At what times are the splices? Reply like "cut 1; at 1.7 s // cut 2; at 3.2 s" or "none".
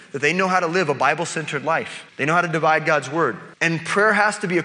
cut 1; at 2.1 s // cut 2; at 3.5 s